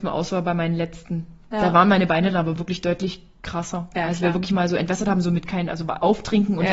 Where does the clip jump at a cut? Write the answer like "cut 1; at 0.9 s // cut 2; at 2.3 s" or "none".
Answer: none